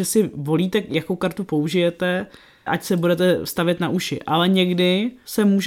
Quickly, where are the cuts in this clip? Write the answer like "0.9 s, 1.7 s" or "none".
2.7 s